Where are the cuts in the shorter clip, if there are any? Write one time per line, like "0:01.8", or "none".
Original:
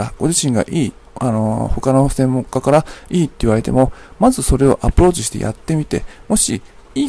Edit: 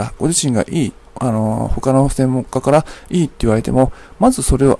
none